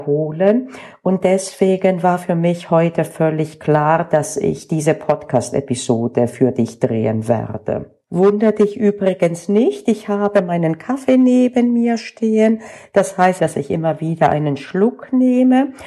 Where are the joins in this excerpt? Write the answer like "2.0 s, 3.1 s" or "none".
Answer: 8.0 s, 13.4 s